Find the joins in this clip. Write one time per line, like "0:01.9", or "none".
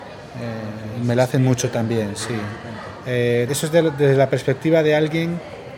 0:03.5